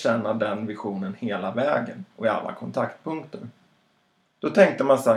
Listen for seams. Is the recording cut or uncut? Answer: cut